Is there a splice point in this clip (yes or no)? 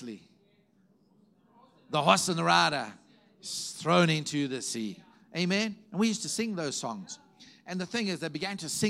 no